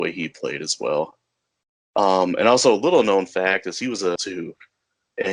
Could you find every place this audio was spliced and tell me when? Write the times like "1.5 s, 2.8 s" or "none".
4.2 s